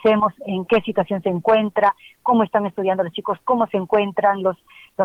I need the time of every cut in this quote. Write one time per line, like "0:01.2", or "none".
none